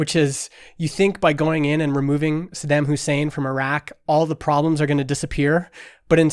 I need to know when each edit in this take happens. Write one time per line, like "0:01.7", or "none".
none